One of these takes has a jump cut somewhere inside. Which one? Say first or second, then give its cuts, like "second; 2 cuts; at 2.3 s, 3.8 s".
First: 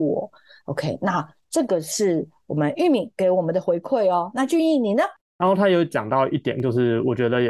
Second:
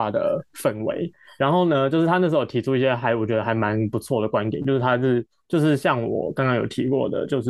first; 1 cut; at 5.2 s